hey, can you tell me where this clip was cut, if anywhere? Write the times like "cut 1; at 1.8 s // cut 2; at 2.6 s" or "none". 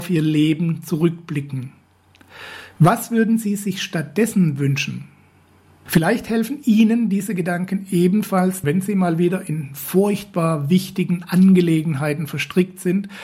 cut 1; at 2.8 s // cut 2; at 5.9 s // cut 3; at 8.6 s